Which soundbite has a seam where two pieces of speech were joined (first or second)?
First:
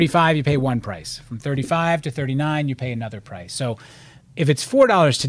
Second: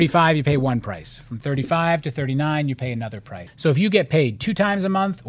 second